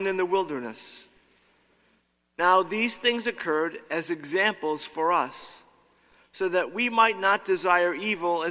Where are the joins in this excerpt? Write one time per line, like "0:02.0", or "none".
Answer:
none